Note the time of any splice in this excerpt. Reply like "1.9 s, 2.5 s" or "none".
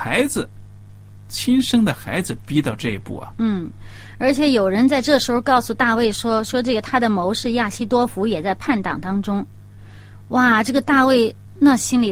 none